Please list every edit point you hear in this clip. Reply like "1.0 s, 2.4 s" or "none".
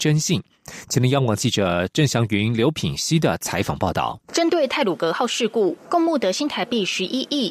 4.2 s, 5.8 s